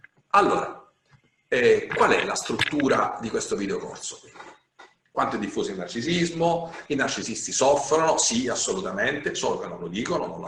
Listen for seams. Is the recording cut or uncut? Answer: uncut